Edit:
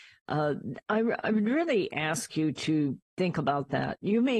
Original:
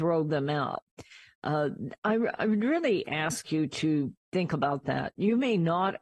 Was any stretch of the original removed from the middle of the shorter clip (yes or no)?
no